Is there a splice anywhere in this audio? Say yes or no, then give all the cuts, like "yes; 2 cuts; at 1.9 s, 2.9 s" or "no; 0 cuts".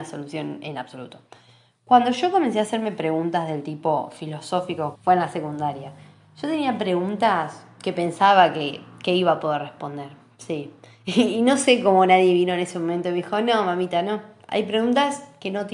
yes; 1 cut; at 4.9 s